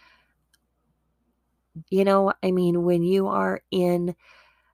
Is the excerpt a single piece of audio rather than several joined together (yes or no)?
no